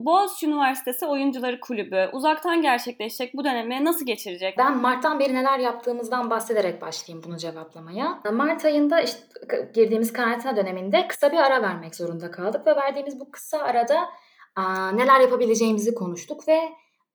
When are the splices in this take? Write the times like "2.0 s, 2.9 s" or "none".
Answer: 4.6 s, 8.2 s